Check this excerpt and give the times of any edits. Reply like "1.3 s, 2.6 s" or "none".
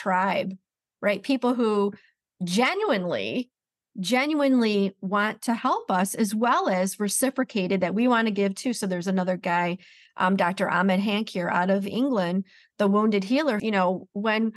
13.6 s